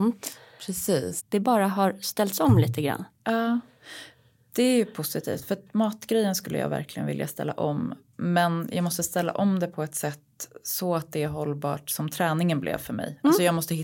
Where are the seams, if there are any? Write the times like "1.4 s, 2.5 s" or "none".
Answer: 1.2 s